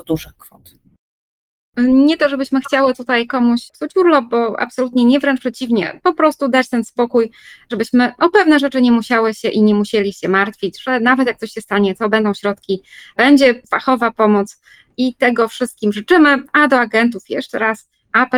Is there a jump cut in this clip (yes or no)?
no